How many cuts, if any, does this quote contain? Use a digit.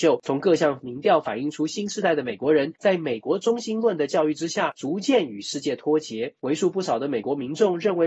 0